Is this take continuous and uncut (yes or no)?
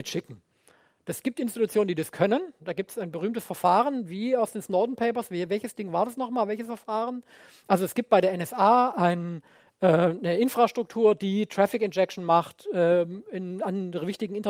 yes